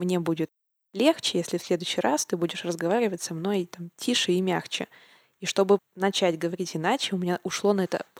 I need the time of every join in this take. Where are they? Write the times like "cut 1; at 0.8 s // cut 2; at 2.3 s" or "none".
cut 1; at 5.8 s